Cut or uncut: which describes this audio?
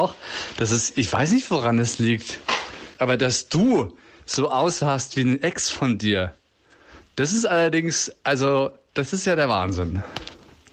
uncut